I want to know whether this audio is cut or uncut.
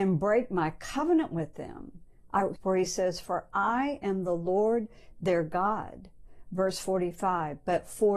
cut